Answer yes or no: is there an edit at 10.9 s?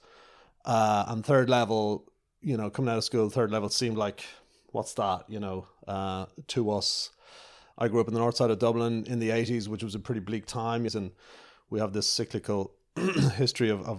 yes